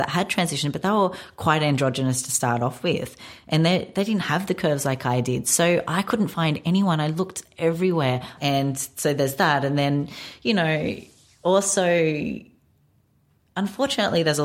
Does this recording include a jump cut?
yes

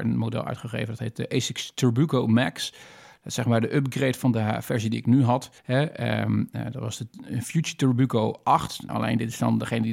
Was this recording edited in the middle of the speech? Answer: yes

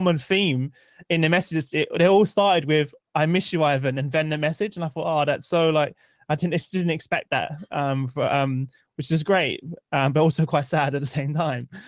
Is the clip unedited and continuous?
yes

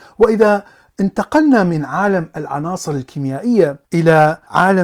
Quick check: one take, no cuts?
no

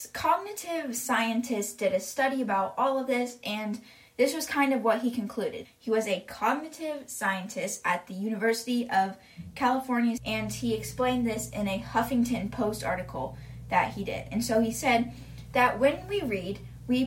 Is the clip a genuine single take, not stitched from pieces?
no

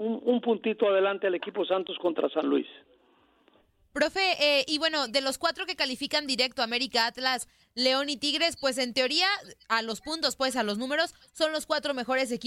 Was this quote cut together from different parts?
no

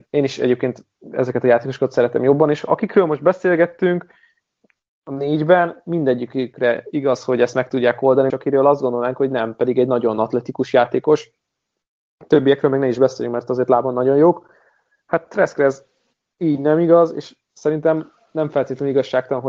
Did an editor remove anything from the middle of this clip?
yes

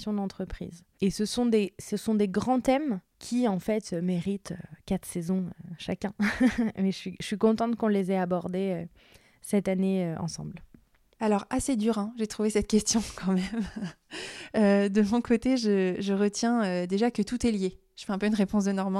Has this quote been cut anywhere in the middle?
no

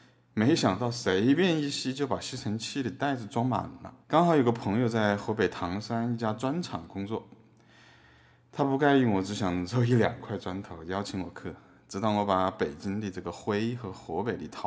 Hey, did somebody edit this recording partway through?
yes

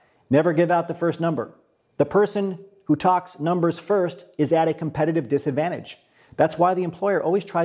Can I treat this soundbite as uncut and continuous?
yes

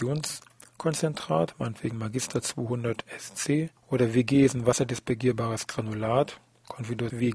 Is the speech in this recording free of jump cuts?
yes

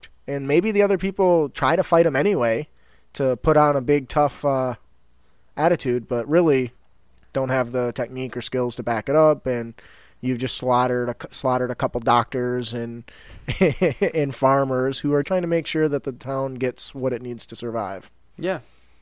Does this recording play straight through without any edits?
no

